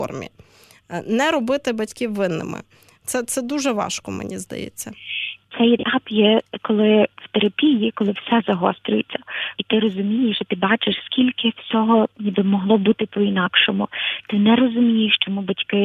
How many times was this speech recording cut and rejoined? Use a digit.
2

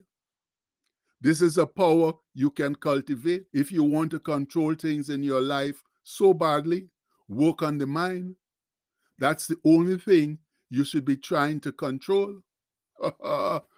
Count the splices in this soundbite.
1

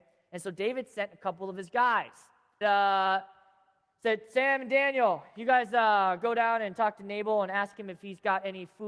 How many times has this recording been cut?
1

